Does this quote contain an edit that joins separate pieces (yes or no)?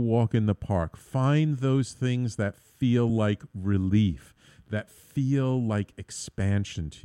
no